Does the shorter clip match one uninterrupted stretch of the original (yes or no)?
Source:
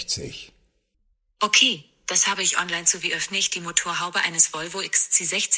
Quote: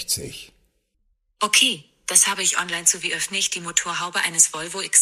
yes